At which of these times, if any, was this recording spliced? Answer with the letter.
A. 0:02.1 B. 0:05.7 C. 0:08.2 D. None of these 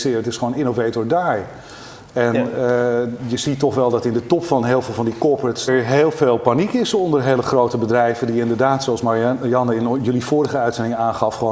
B